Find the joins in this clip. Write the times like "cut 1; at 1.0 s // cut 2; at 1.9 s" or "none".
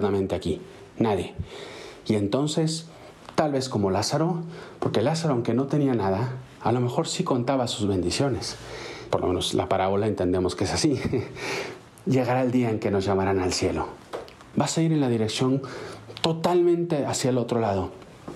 cut 1; at 9.1 s // cut 2; at 14.5 s